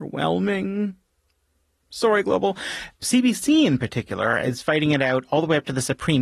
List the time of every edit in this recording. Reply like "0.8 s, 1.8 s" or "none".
3.0 s